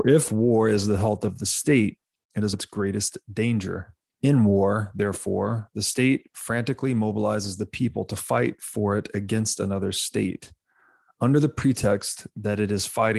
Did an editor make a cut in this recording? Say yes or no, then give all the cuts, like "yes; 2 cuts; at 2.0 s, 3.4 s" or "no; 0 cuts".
yes; 2 cuts; at 2.5 s, 4.1 s